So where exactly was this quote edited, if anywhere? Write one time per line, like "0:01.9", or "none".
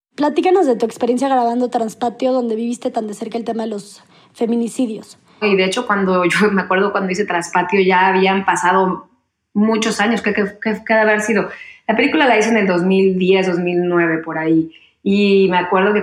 0:05.4